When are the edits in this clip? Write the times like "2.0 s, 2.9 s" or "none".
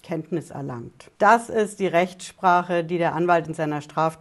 1.1 s